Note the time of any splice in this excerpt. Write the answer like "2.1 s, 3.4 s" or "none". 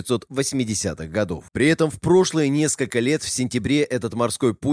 1.5 s